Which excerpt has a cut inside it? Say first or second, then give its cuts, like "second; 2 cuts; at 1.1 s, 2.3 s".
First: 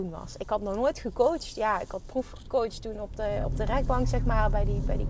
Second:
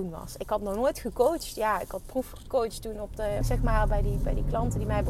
second; 1 cut; at 3.4 s